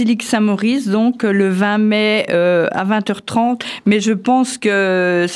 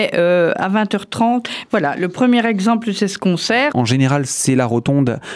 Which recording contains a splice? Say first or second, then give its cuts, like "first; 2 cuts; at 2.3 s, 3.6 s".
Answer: second; 2 cuts; at 1.7 s, 3.7 s